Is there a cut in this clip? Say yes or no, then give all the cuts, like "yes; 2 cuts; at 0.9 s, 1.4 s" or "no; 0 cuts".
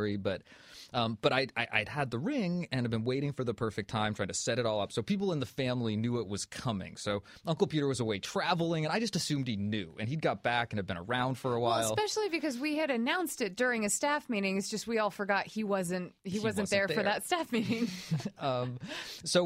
no; 0 cuts